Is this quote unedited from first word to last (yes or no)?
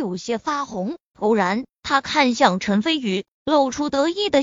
yes